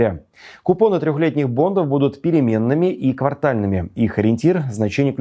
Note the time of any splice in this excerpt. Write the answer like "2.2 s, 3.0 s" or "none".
none

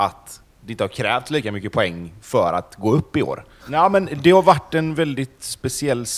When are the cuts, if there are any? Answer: 3.6 s

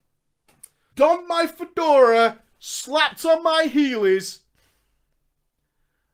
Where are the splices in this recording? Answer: 0.9 s

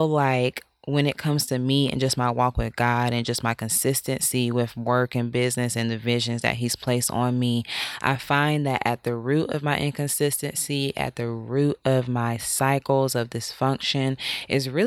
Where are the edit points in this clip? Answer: none

